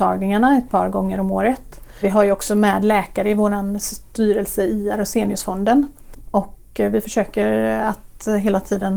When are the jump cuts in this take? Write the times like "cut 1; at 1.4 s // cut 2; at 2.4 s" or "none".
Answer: none